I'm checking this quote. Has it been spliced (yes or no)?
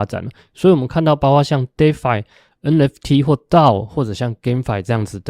no